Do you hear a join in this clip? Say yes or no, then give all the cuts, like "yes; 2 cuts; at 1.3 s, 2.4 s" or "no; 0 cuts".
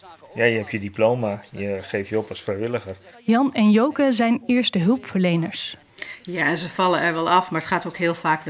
yes; 1 cut; at 3.1 s